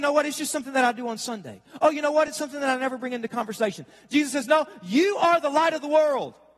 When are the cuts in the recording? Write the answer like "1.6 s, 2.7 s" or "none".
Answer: none

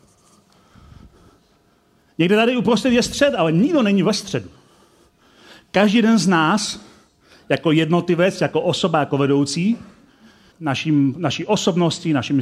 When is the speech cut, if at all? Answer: 10.5 s

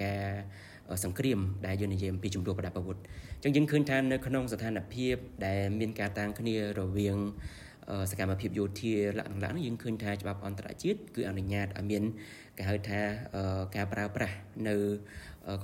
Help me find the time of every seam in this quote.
6.1 s

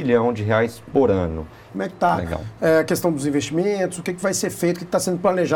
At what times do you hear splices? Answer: 1.7 s

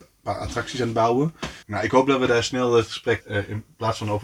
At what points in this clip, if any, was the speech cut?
1.6 s, 3.2 s

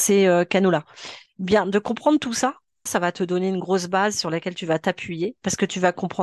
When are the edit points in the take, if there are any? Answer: 2.9 s

